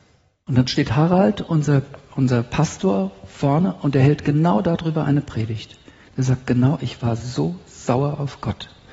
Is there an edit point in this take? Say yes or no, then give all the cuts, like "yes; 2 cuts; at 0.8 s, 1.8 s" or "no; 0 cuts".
no; 0 cuts